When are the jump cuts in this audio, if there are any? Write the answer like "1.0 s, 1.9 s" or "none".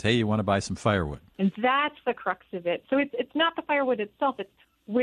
1.3 s